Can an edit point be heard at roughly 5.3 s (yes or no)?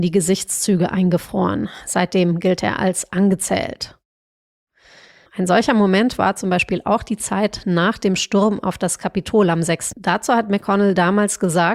yes